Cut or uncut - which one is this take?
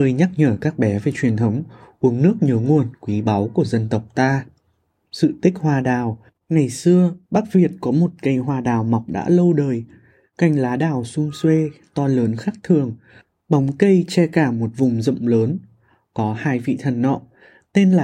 cut